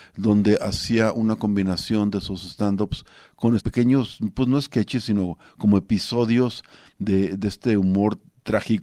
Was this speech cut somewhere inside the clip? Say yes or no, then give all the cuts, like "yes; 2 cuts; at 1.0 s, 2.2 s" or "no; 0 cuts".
yes; 1 cut; at 3.6 s